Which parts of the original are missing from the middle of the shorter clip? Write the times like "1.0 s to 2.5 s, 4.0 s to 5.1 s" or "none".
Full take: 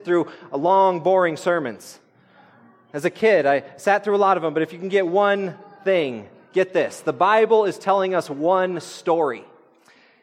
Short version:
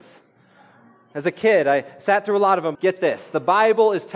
4.5 s to 6.5 s